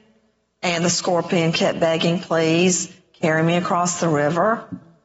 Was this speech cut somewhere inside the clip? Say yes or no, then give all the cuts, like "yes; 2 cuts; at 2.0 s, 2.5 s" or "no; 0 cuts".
no; 0 cuts